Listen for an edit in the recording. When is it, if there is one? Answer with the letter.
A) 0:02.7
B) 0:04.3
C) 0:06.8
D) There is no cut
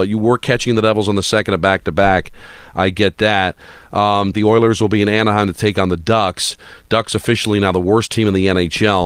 B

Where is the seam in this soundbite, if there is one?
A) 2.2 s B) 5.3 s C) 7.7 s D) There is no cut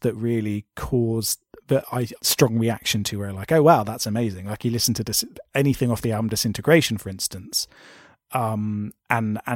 A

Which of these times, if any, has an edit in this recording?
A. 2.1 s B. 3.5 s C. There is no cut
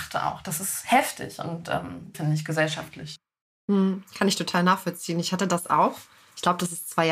A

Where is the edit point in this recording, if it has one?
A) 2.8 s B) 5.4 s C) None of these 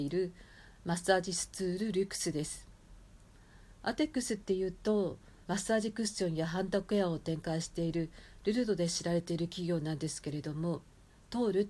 B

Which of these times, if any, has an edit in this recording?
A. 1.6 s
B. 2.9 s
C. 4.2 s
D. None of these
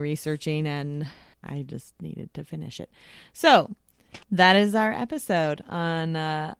C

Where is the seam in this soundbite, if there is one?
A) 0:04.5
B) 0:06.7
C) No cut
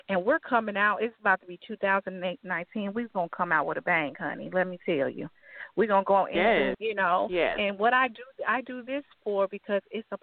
B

